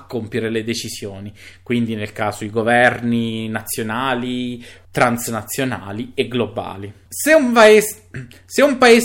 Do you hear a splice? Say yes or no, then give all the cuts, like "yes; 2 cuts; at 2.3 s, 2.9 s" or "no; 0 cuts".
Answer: no; 0 cuts